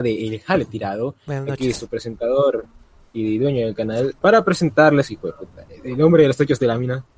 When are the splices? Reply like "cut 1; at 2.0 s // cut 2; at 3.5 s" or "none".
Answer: cut 1; at 4.2 s